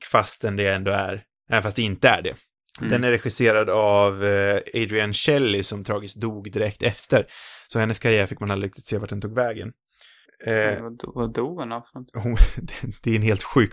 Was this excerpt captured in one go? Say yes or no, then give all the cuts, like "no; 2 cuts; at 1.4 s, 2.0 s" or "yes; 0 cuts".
yes; 0 cuts